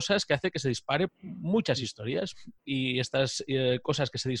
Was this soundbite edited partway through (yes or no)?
yes